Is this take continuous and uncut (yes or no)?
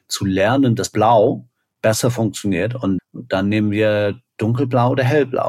no